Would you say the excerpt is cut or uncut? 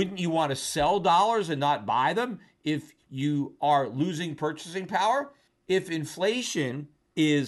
uncut